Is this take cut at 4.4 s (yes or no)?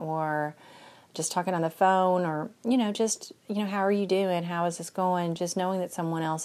no